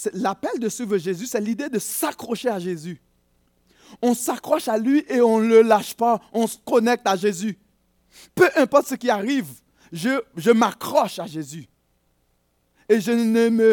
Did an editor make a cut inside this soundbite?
yes; 1 cut; at 8.3 s

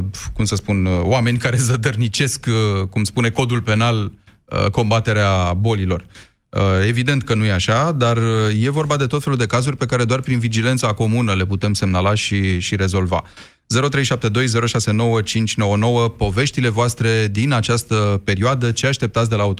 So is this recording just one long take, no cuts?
yes; 0 cuts

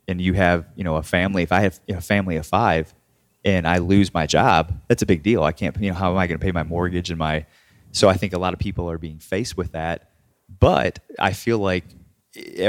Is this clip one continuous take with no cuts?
yes; 0 cuts

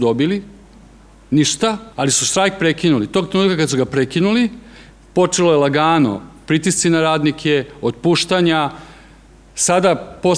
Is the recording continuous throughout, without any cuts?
no; 1 cut; at 1.9 s

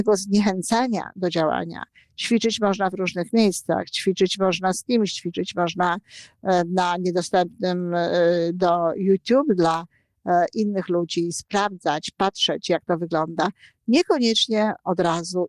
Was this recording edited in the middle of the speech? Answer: no; 0 cuts

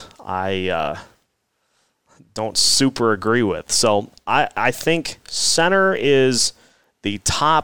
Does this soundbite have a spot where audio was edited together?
no; 0 cuts

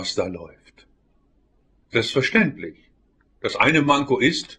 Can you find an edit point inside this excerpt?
yes; 1 cut; at 3.3 s

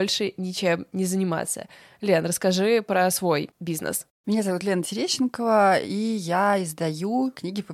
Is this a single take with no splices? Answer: yes; 0 cuts

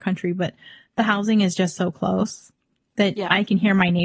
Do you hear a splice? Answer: no; 0 cuts

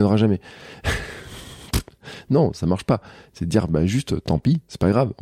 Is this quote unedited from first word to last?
yes; 0 cuts

